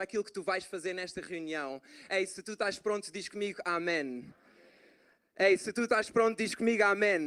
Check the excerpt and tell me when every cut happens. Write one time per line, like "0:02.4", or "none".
none